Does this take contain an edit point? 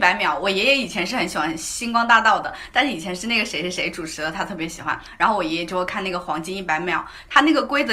no; 0 cuts

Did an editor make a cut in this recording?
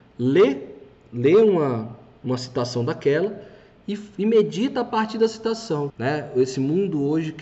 yes; 1 cut; at 5.9 s

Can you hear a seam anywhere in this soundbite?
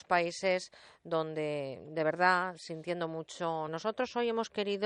yes; 1 cut; at 3.7 s

